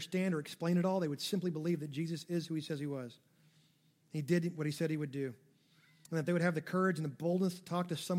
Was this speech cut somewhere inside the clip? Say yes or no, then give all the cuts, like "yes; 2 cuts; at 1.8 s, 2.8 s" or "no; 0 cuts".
no; 0 cuts